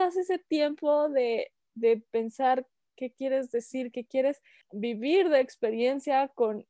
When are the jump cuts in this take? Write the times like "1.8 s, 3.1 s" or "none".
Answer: 3.9 s